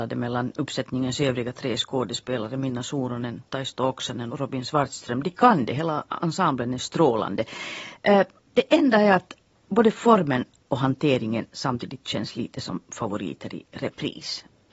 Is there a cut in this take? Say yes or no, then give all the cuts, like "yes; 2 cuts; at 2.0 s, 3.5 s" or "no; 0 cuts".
yes; 1 cut; at 4.3 s